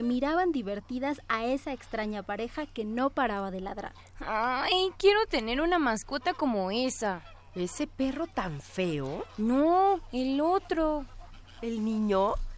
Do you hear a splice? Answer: no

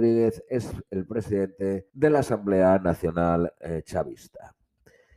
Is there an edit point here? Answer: yes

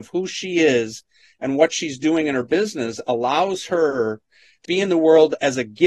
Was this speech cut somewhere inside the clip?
yes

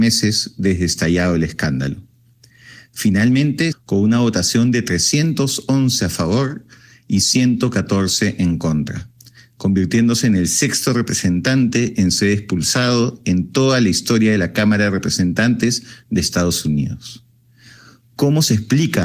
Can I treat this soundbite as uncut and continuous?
no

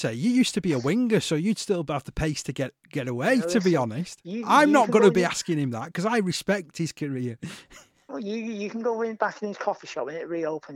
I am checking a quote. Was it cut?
no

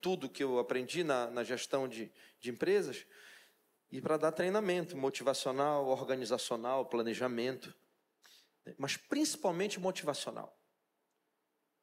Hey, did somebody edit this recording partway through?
no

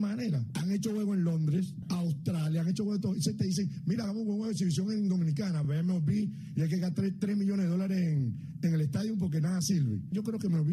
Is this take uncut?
yes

